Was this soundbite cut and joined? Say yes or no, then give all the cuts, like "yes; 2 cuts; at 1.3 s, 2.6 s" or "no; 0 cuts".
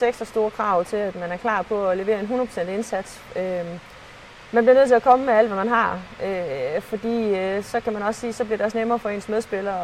no; 0 cuts